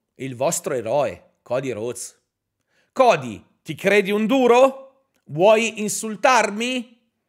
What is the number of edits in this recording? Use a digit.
0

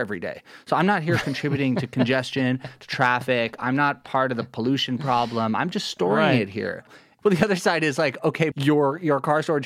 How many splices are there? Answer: 1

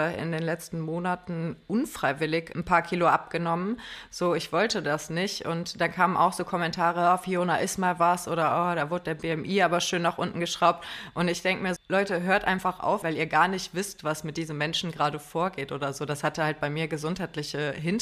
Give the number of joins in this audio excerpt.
2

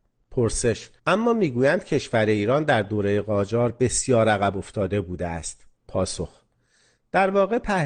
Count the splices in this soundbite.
2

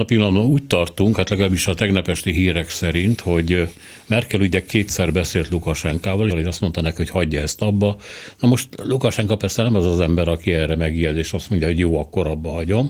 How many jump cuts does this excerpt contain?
1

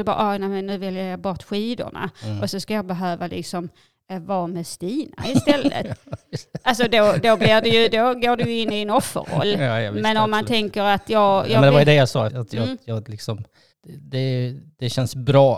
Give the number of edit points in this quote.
2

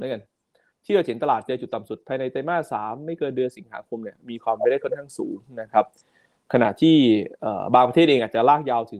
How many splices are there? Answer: 0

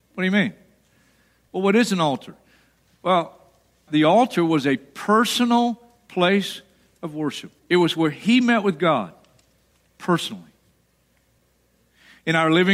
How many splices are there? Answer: 2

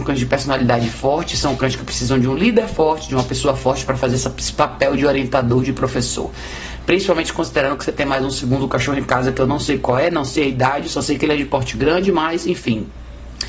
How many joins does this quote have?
0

